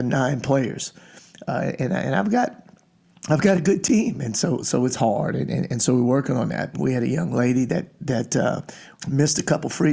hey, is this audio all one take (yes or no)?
no